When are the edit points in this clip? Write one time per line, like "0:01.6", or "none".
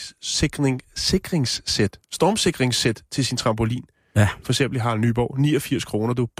none